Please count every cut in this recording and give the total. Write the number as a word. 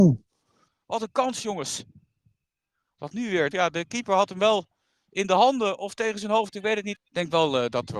two